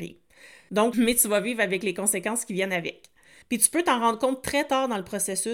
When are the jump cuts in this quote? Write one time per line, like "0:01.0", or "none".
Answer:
0:00.9
0:03.4